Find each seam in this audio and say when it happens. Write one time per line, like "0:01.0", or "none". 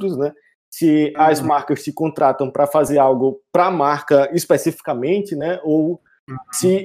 none

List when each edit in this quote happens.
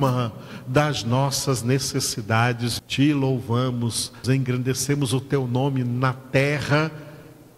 0:02.8
0:04.2

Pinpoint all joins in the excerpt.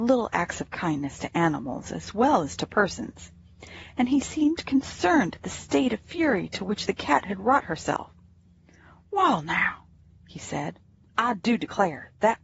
none

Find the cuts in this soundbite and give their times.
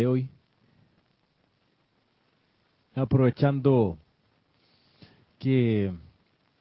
none

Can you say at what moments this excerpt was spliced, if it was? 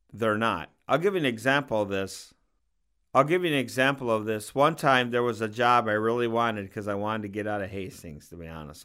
none

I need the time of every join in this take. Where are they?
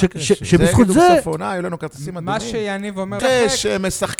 0:03.2

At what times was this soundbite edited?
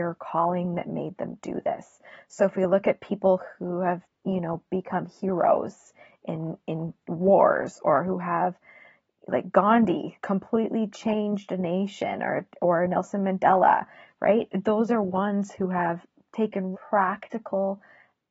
0:10.1
0:16.7

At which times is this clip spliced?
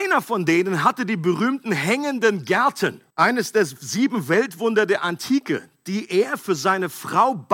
0:03.1

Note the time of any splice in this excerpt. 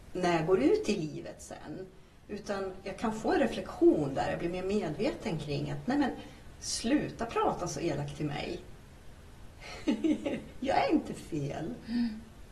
none

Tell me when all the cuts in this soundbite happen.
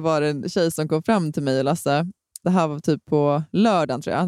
none

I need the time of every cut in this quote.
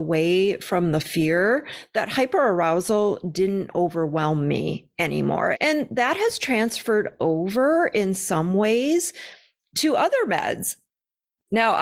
0:05.5

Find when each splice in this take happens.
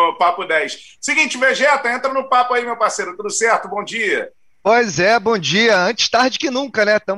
none

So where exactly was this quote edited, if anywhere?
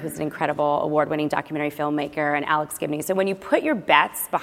none

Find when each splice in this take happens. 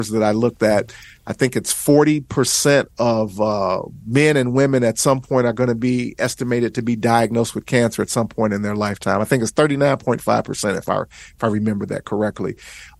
none

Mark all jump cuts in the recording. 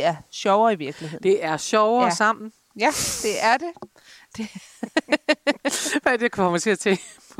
none

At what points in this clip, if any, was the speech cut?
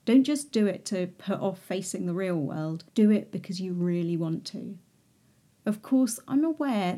0:02.9

